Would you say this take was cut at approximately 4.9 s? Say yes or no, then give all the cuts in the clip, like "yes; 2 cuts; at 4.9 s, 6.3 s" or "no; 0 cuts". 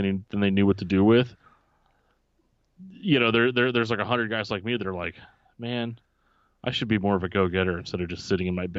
no; 0 cuts